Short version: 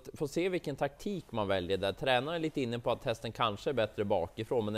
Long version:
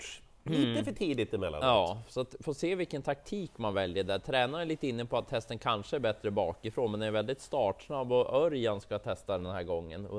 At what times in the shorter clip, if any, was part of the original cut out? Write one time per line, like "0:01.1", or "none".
none